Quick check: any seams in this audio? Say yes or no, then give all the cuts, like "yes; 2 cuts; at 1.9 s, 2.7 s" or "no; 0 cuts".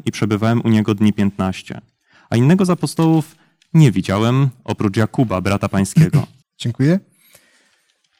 yes; 1 cut; at 6.4 s